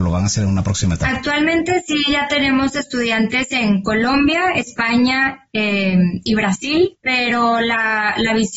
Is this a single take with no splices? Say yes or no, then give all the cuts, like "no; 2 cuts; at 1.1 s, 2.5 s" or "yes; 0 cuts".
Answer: no; 1 cut; at 6.9 s